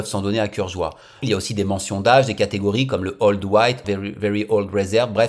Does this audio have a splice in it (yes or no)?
yes